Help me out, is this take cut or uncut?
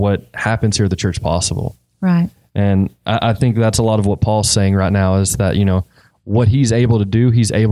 uncut